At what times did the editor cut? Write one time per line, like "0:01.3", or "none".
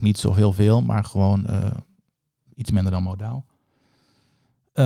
none

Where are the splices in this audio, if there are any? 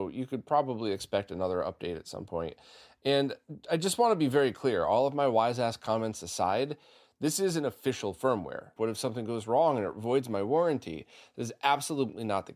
0:08.8

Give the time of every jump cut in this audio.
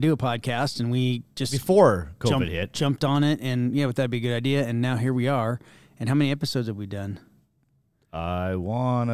none

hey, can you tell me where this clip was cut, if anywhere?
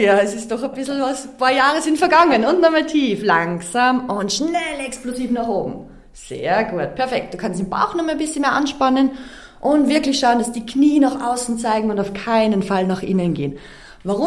none

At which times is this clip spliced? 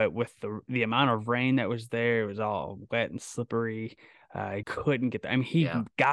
0:04.6

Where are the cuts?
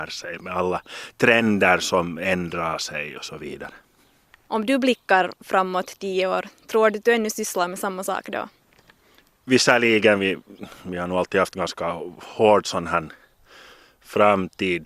none

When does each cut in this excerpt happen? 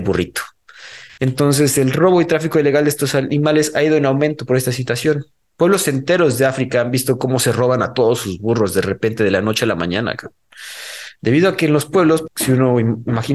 0:12.3

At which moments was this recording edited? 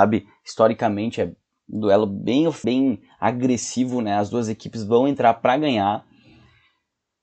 0:02.6

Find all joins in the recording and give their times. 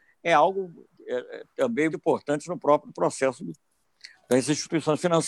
0:01.9

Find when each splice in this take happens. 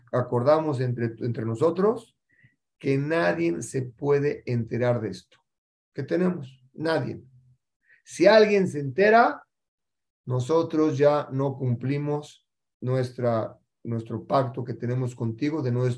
none

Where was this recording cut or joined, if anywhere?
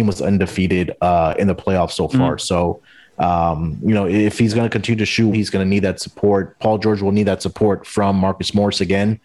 0:05.3

